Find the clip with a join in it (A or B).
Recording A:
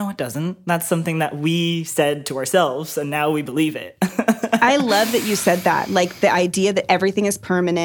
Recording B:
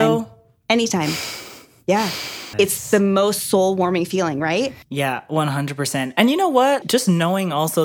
B